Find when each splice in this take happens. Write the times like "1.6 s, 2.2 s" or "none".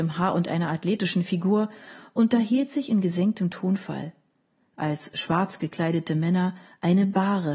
4.7 s